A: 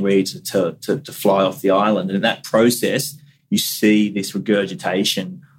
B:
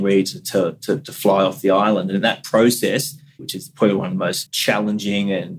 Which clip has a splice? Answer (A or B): B